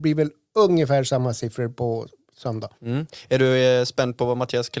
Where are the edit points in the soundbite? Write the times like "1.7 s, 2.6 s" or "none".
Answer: 2.7 s